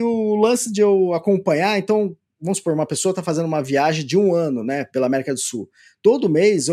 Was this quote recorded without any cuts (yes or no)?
yes